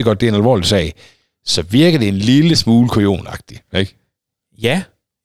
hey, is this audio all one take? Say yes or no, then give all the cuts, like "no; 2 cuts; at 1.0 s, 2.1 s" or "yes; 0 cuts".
yes; 0 cuts